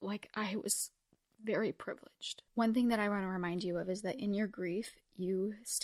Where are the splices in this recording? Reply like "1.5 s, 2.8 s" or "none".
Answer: 2.5 s